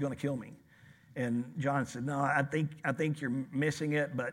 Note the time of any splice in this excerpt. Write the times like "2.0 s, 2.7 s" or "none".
none

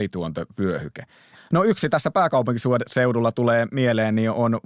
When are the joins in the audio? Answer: 1.3 s

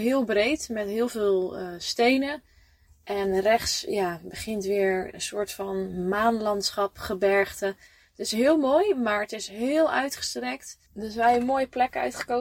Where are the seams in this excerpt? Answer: 10.9 s

